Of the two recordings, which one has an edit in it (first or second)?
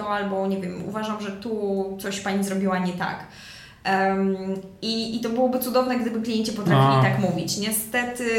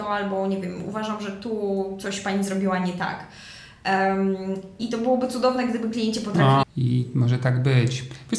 second